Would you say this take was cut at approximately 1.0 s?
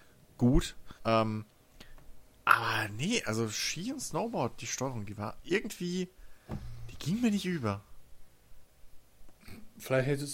yes; 1 cut; at 1.0 s

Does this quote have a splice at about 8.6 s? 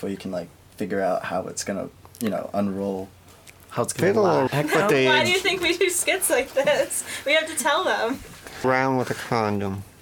yes; 2 cuts; at 4.5 s, 8.6 s

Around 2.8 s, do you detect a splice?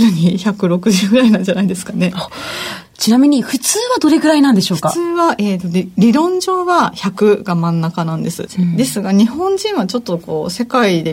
yes; 1 cut; at 2.8 s

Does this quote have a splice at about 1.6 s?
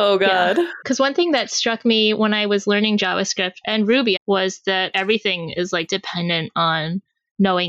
no; 2 cuts; at 4.2 s, 5.9 s

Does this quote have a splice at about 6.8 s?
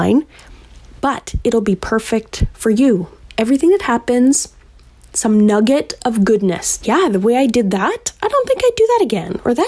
yes; 2 cuts; at 5.1 s, 6.8 s

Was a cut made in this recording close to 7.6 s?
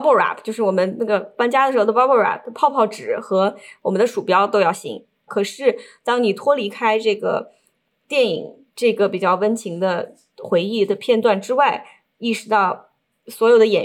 no; 1 cut; at 5.3 s

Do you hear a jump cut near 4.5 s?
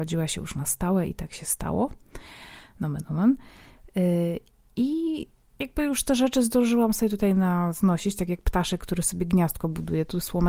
no; 0 cuts

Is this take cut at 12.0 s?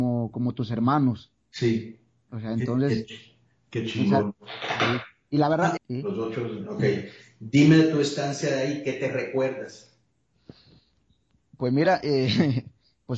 no; 1 cut; at 5.8 s

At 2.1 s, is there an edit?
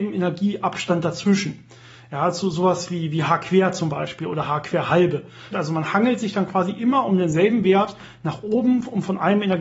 no; 1 cut; at 5.5 s

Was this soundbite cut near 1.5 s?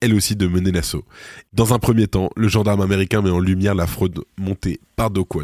yes; 1 cut; at 1.5 s

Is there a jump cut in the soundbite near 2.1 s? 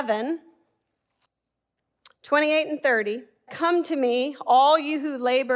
no; 1 cut; at 3.5 s

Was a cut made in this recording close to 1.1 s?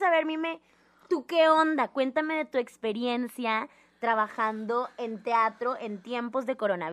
no; 0 cuts

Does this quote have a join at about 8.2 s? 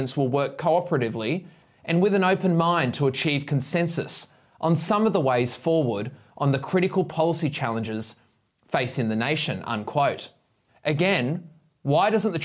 no; 1 cut; at 10.7 s

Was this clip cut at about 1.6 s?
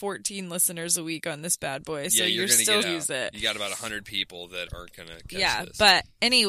no; 2 cuts; at 2.8 s, 4.7 s

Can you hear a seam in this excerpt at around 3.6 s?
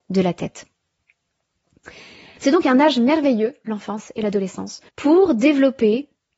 no; 2 cuts; at 2.4 s, 4.9 s

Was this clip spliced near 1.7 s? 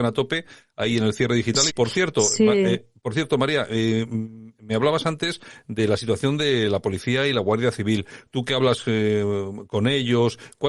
yes; 1 cut; at 1.7 s

